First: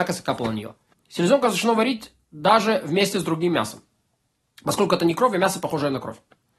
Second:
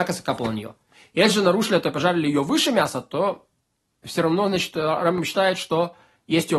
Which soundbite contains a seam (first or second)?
first